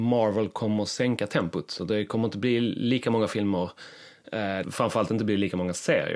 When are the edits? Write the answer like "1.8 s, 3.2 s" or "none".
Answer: 4.6 s